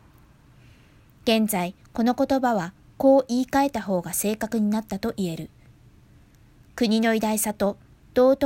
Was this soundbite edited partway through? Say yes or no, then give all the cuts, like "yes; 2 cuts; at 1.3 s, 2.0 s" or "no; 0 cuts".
no; 0 cuts